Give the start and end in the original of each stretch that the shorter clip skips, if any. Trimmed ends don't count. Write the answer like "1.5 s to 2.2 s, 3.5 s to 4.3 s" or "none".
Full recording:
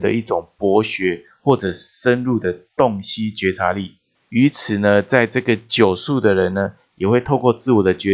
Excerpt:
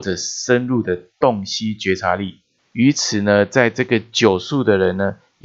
none